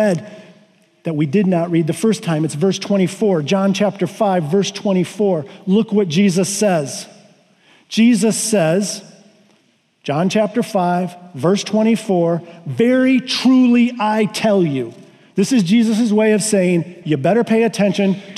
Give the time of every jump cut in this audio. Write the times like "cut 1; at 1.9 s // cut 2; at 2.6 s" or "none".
cut 1; at 17.0 s